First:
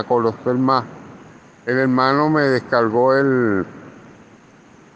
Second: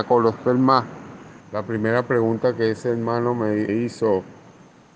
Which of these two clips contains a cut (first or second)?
second